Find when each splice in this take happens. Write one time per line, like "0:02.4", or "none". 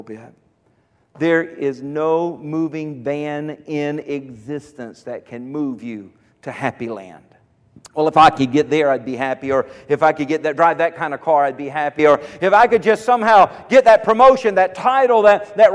0:07.8
0:12.0